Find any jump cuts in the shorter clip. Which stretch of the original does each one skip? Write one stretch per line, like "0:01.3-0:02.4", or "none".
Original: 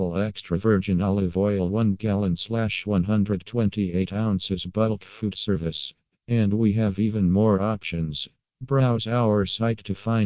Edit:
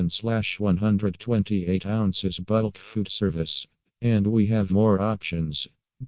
0:07.0-0:07.3